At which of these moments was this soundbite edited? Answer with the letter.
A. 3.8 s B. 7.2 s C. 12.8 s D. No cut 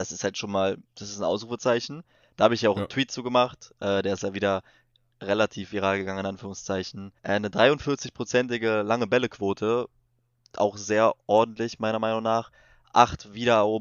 B